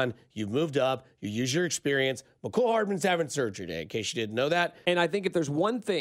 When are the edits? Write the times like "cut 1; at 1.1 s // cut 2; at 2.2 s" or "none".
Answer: cut 1; at 4.8 s